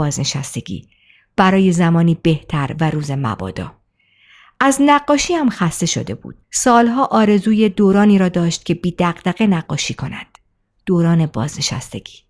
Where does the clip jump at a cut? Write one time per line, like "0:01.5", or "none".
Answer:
0:06.4